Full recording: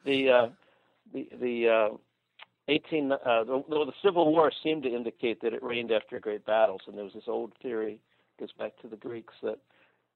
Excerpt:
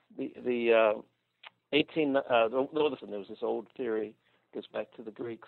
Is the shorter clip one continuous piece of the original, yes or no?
no